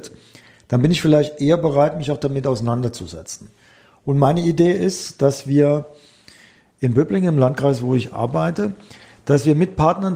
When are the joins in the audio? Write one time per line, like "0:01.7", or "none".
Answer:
none